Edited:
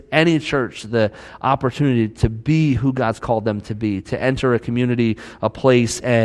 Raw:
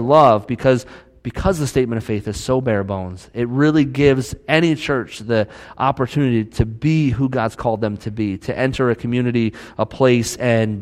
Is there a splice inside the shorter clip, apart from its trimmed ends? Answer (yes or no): no